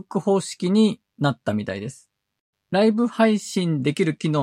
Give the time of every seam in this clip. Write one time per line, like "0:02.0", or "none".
0:02.5